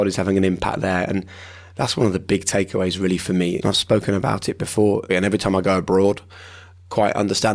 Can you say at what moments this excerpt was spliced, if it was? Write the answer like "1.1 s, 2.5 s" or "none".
3.6 s, 5.1 s

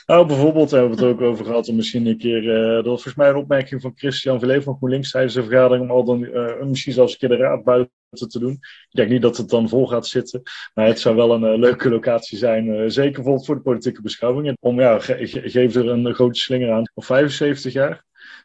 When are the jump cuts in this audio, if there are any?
14.5 s, 16.9 s

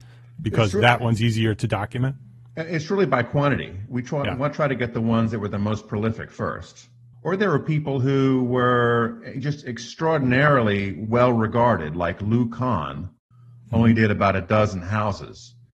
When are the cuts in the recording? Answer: 7.1 s

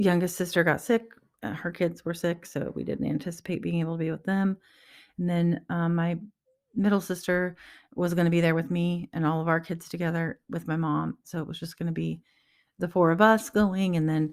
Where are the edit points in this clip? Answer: 11.2 s

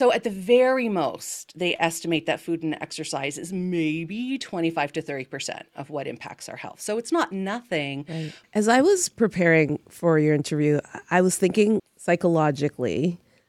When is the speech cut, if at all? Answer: 8.4 s, 11.8 s

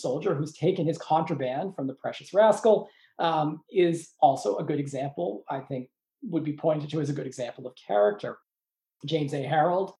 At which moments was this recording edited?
none

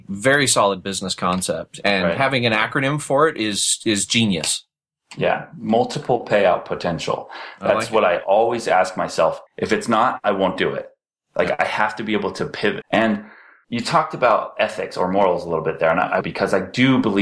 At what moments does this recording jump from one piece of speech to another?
9.5 s, 12.8 s, 16.2 s

